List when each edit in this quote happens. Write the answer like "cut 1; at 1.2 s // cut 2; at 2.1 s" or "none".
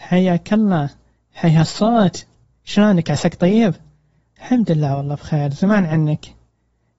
none